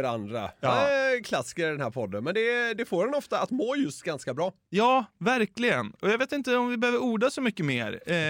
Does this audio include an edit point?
no; 0 cuts

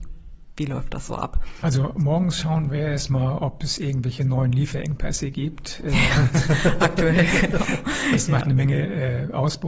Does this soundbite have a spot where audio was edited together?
no; 0 cuts

